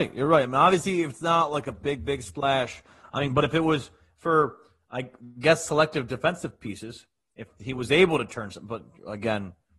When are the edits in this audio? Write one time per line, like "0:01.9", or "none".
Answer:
none